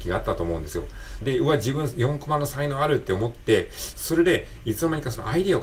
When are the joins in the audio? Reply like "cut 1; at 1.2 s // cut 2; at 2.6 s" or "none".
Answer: cut 1; at 1.2 s // cut 2; at 3.9 s